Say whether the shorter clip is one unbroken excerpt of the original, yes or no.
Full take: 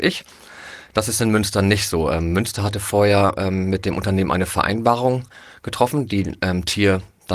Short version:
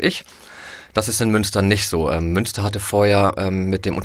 yes